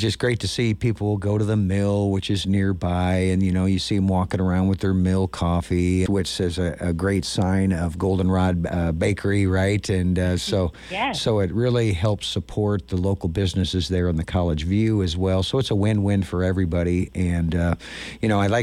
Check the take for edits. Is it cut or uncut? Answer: cut